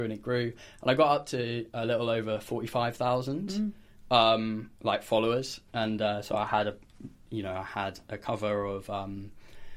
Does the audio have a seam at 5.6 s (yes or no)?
no